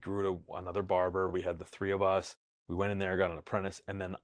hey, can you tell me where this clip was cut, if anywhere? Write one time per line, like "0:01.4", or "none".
none